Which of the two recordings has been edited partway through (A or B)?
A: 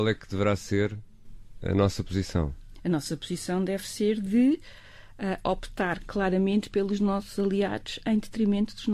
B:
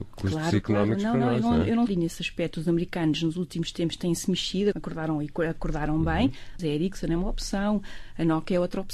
B